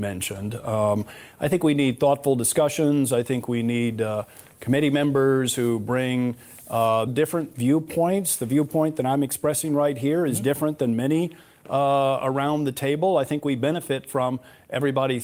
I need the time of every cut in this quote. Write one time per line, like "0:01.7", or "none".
0:07.1